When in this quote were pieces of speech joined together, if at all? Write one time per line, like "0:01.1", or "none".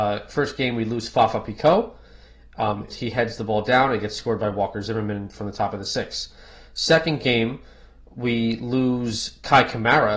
0:02.9